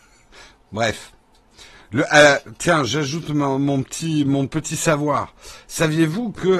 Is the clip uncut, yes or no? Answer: yes